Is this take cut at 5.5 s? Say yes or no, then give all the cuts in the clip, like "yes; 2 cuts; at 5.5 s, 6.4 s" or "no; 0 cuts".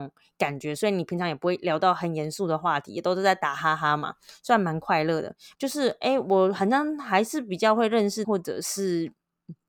yes; 2 cuts; at 5.5 s, 8.2 s